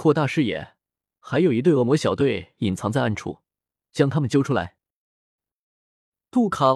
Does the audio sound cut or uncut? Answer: cut